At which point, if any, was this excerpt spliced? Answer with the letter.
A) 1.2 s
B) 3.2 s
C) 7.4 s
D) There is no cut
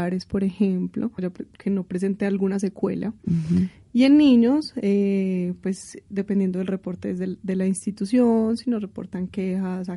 A